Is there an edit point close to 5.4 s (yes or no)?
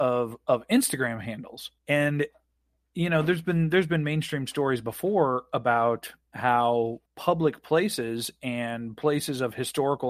no